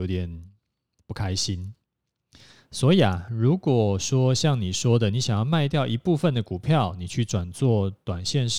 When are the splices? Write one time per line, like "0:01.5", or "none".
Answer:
none